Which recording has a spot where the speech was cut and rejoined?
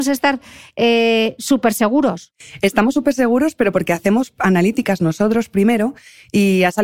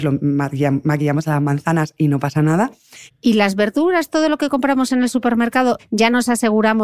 second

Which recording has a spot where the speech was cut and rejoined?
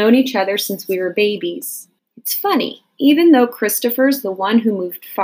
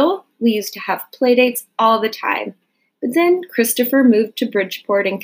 first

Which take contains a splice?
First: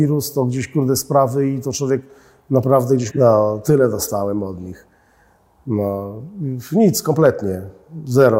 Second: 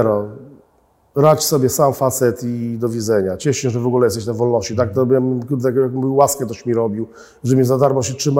first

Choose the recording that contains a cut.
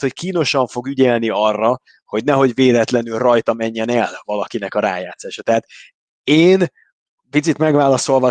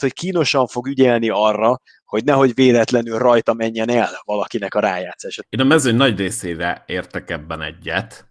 second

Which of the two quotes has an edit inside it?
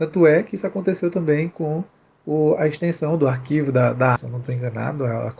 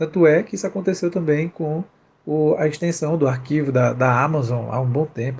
first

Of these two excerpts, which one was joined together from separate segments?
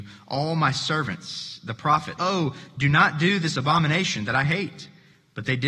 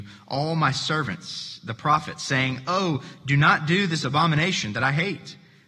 first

